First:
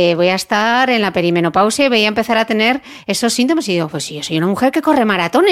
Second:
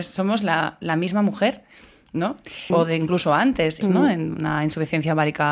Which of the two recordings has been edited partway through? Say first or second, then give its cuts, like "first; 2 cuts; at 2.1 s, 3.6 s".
second; 2 cuts; at 2.7 s, 3.8 s